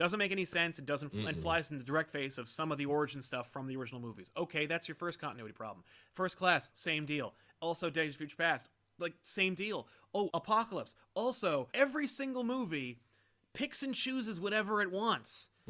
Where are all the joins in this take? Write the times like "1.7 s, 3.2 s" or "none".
6.7 s, 10.3 s, 11.7 s